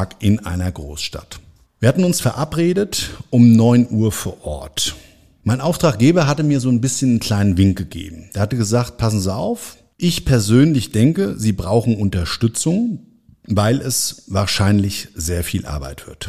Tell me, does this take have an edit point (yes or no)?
no